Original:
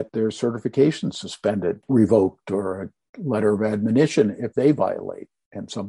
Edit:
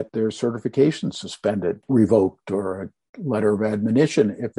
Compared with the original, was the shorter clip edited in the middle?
no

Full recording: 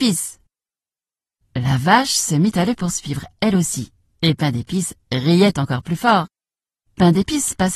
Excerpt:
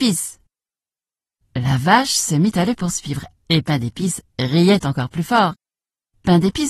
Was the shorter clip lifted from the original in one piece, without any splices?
no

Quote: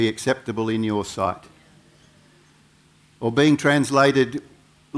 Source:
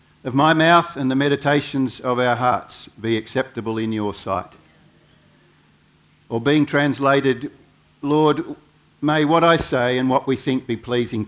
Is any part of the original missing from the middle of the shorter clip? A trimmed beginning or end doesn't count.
no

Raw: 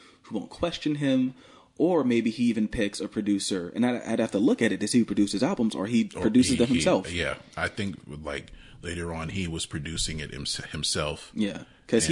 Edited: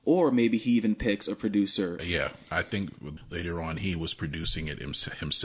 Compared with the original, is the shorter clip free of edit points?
no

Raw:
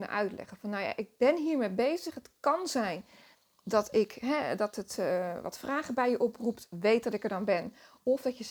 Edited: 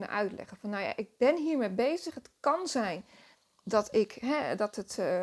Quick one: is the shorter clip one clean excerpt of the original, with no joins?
yes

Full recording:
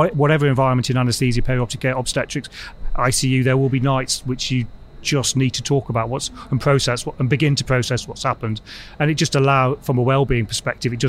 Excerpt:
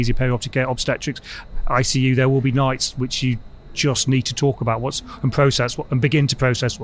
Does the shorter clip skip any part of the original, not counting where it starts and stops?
no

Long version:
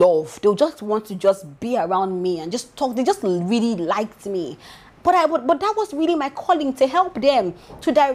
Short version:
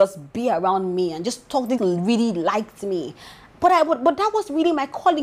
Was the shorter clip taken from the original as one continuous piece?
no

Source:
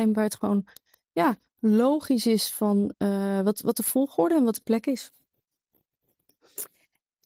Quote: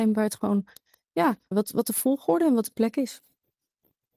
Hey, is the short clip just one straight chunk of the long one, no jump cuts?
no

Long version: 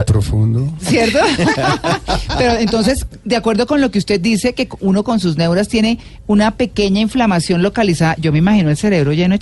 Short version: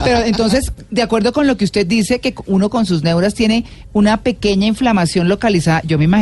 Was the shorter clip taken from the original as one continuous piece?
yes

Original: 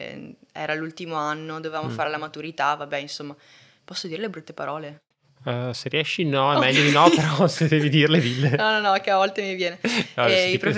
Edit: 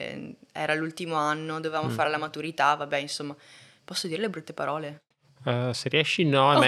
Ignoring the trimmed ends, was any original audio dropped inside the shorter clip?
no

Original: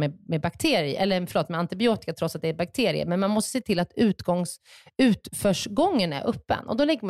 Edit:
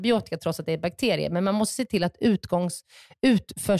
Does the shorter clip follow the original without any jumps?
yes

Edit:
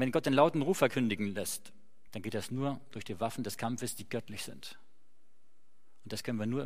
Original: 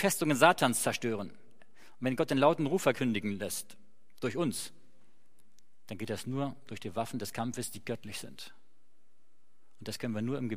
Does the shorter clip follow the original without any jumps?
no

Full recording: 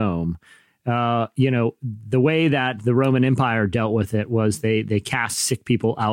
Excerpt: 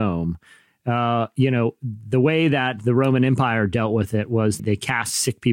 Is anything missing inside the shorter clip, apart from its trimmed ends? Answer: yes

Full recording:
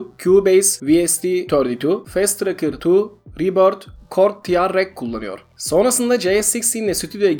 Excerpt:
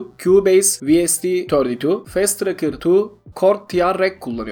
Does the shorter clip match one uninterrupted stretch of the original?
no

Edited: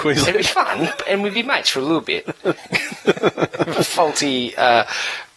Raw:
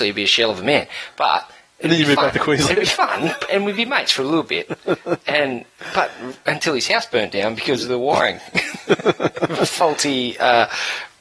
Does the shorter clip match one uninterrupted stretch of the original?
no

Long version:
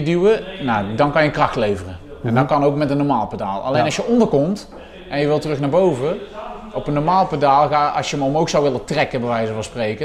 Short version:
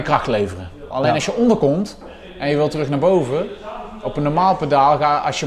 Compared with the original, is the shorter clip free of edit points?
no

